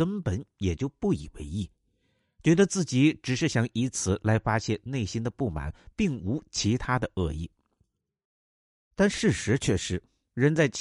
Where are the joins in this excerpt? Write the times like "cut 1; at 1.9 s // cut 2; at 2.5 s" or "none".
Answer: none